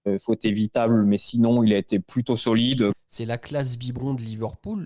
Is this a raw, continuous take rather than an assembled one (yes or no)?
no